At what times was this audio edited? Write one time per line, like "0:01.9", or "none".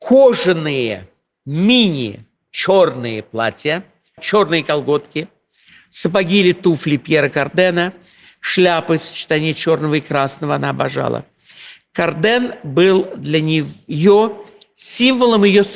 0:04.2